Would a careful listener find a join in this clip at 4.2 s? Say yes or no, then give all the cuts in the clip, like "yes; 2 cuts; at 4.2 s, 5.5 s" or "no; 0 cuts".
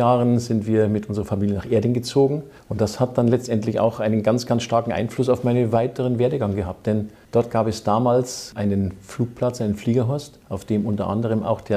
no; 0 cuts